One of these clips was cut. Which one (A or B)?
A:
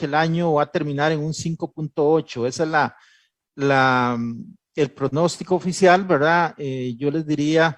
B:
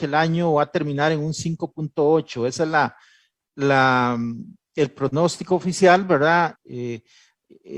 B